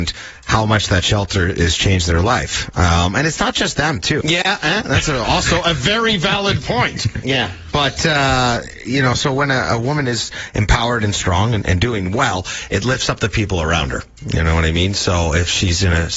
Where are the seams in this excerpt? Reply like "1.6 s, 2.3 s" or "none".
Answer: 4.2 s, 7.2 s